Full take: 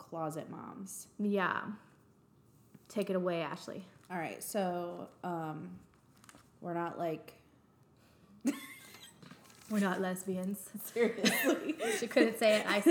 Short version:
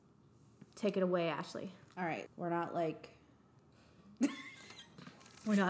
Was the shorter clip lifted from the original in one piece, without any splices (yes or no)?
no